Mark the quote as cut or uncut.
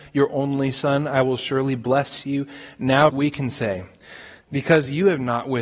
cut